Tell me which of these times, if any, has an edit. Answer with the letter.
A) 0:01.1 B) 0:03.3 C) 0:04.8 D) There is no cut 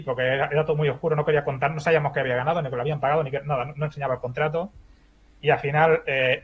D